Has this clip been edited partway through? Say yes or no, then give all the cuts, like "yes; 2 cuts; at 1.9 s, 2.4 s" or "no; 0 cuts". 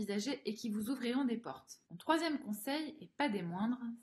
no; 0 cuts